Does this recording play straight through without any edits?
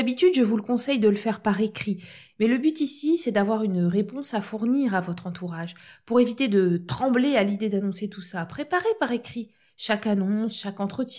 no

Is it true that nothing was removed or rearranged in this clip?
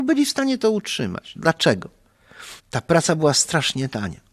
no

